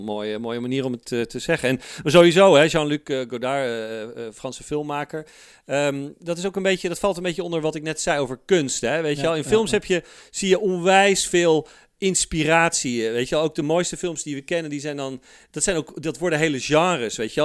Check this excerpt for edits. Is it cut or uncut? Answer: uncut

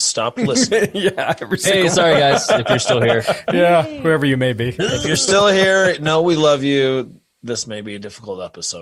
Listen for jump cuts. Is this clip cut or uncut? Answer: uncut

